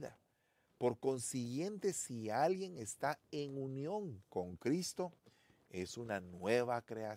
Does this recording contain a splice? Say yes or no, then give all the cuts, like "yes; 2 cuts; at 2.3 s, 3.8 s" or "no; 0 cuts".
yes; 1 cut; at 4.2 s